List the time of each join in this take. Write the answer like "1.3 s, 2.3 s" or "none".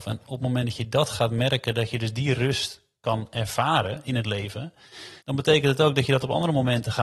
5.2 s